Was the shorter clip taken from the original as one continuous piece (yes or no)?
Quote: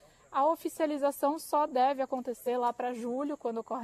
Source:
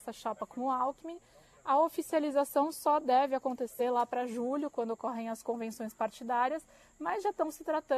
yes